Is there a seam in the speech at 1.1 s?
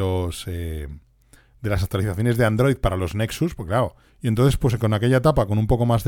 no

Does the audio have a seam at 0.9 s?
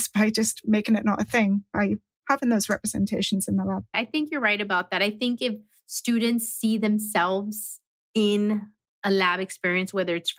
no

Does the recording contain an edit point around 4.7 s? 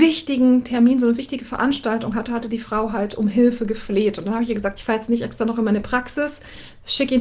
yes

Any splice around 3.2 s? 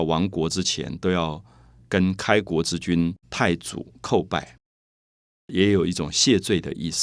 yes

